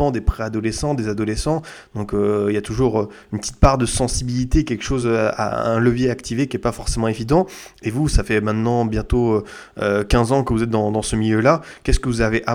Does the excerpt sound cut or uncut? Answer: uncut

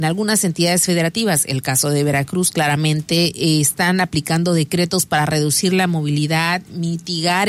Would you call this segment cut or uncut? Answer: uncut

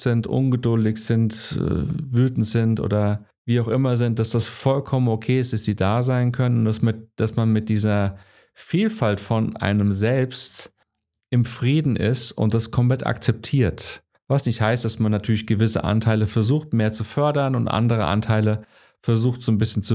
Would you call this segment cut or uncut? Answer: uncut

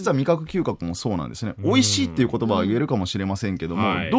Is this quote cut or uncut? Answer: uncut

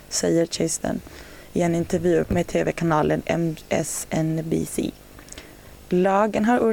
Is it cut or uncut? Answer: cut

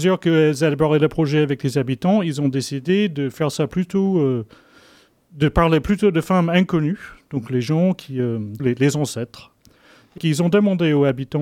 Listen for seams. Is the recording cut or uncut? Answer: cut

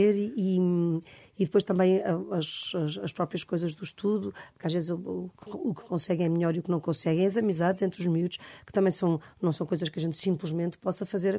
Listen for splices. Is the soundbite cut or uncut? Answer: uncut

